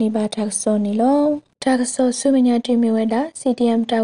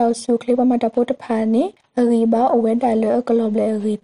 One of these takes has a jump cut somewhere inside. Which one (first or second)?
first